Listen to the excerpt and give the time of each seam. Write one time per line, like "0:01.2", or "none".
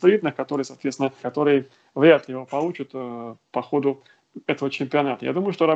0:01.2